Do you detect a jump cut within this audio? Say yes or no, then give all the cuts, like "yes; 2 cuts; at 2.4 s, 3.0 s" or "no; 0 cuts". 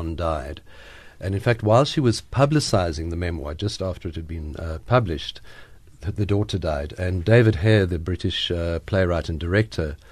no; 0 cuts